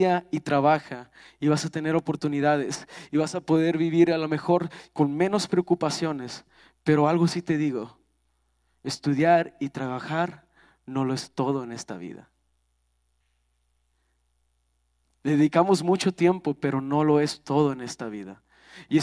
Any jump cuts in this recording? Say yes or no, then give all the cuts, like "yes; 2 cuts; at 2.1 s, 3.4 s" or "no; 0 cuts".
no; 0 cuts